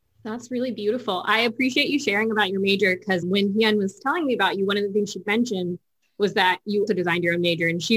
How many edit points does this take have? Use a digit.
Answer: 2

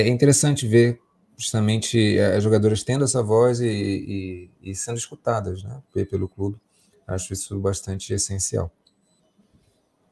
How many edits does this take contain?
0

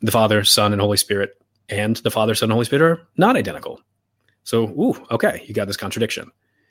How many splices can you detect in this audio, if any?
1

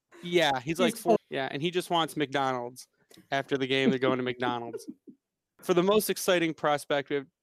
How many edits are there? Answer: 1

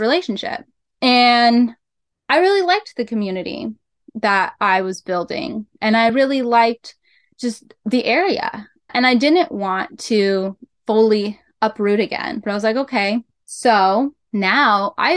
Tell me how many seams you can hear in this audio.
0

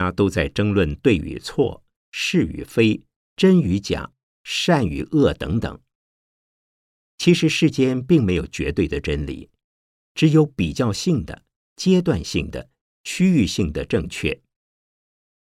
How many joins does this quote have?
0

